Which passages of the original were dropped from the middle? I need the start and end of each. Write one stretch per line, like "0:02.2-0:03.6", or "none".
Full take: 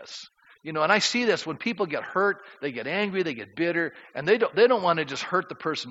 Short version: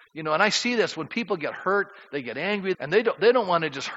0:03.2-0:04.1